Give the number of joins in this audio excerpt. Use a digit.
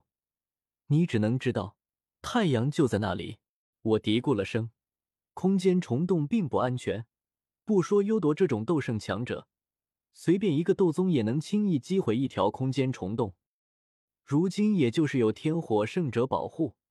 1